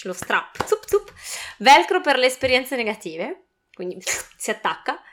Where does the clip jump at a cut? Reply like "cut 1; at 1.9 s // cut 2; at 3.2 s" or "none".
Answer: none